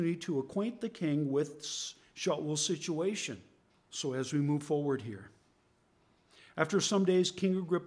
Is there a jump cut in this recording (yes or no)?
yes